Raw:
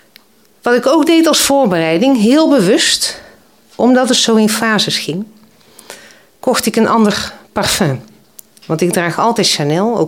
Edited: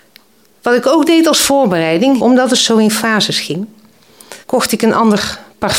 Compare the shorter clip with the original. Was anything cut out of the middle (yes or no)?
yes